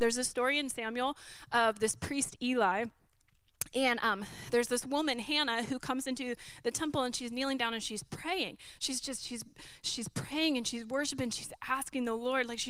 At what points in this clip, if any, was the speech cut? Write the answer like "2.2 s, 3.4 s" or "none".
none